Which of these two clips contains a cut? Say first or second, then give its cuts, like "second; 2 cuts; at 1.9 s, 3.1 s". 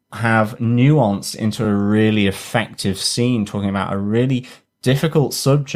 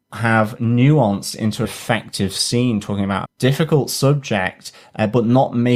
second; 2 cuts; at 1.6 s, 3.2 s